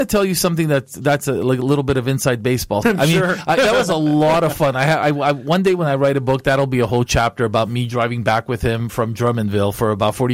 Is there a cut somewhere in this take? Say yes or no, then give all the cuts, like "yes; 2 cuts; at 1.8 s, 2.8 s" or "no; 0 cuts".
yes; 1 cut; at 2.8 s